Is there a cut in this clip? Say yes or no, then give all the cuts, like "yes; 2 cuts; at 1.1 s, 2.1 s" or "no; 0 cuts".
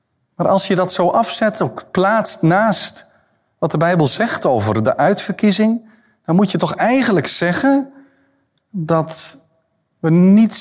no; 0 cuts